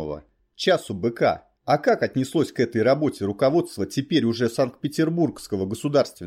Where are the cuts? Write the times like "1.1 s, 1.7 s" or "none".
1.6 s